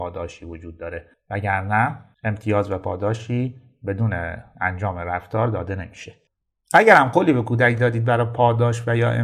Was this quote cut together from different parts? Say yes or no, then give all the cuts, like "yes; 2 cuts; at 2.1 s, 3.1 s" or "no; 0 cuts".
no; 0 cuts